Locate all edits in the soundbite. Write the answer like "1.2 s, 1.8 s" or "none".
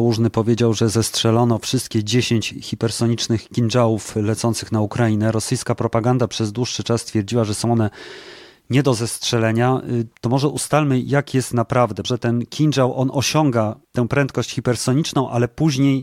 10.2 s, 12.0 s